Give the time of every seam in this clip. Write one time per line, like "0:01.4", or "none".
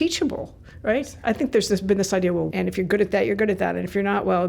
0:02.5